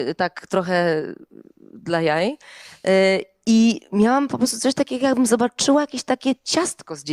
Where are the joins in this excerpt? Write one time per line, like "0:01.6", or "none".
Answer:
none